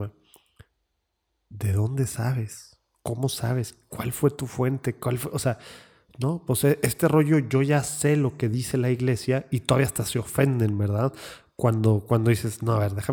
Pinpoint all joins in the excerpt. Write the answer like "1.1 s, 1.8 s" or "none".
none